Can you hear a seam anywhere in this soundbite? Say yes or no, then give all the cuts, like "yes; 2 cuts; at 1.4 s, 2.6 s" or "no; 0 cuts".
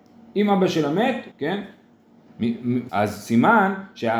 yes; 2 cuts; at 1.3 s, 2.9 s